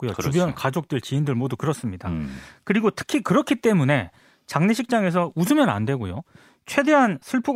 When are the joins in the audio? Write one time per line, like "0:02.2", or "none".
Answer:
none